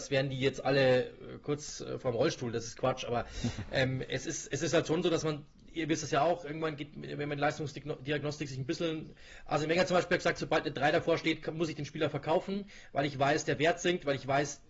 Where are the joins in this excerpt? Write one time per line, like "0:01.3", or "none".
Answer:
none